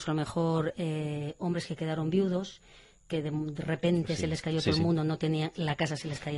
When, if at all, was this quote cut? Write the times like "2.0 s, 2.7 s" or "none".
none